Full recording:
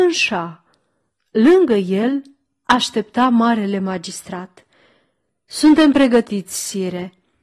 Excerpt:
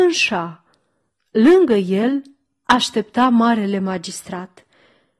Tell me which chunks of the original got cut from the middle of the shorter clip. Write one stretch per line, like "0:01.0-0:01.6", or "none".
none